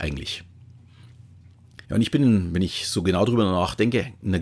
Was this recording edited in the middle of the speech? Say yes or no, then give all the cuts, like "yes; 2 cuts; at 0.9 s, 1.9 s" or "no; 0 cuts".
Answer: yes; 1 cut; at 1.8 s